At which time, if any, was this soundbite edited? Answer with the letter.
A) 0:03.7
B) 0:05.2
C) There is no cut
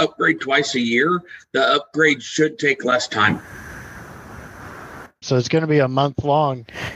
B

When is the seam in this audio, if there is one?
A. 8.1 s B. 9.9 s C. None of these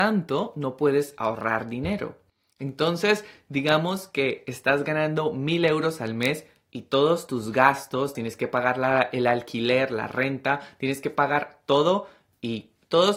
A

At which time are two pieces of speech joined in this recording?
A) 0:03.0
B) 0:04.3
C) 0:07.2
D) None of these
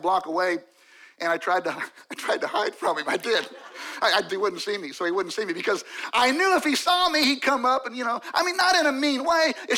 B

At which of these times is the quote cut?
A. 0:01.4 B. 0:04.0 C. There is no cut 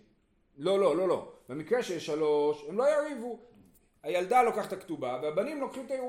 C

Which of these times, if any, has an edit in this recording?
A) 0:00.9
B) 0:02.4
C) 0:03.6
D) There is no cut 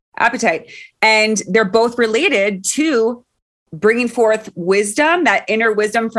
D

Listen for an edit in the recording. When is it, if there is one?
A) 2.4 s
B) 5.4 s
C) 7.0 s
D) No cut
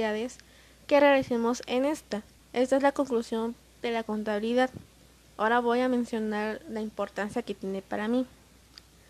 A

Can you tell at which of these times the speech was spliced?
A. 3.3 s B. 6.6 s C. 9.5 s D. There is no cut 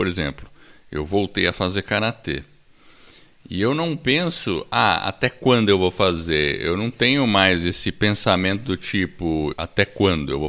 C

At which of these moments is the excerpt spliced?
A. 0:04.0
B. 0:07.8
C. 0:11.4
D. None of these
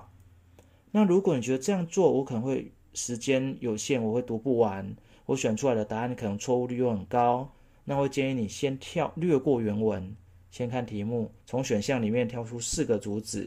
C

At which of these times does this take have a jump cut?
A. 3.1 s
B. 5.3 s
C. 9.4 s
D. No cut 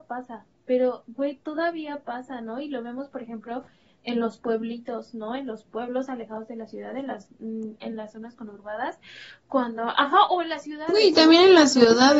D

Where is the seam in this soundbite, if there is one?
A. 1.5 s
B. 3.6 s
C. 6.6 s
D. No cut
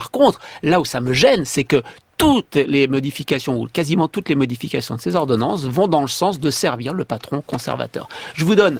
D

